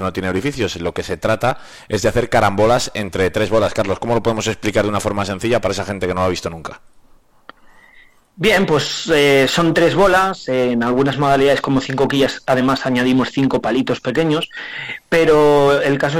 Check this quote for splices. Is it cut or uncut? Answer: uncut